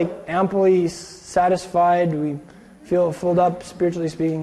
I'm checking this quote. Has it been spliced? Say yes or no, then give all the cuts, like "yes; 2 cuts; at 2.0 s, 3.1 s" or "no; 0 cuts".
no; 0 cuts